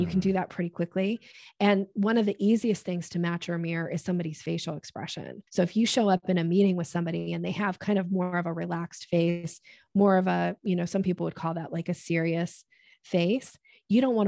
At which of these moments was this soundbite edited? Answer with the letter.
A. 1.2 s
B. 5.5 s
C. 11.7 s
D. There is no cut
B